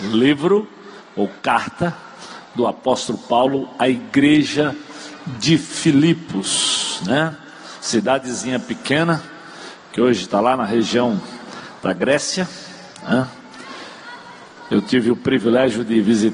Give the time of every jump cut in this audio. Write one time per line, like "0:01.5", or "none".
none